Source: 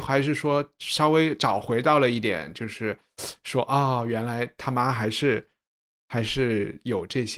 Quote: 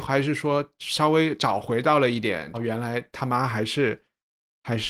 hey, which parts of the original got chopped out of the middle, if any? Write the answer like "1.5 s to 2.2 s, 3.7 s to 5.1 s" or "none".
2.5 s to 4.0 s